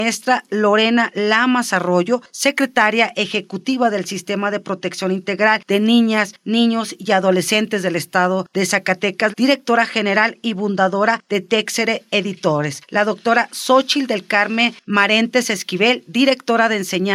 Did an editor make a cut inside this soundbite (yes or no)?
yes